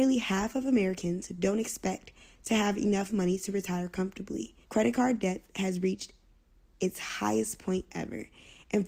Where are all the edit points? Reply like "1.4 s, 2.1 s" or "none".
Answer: 4.6 s